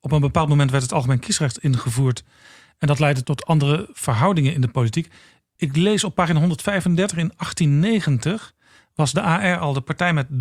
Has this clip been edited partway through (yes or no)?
yes